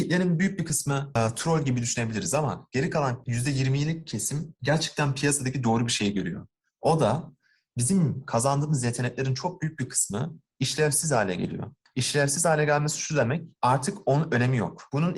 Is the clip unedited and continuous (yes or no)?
yes